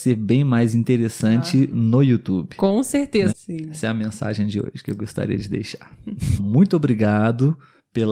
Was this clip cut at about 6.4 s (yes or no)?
yes